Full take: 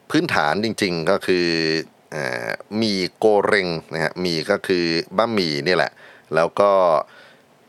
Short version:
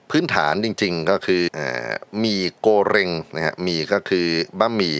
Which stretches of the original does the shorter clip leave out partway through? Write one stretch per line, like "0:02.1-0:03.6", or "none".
0:01.5-0:02.1